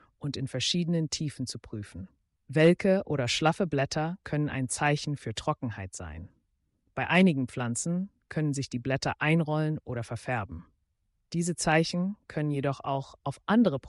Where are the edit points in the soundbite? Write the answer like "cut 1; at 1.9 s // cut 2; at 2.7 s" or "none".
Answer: cut 1; at 2.4 s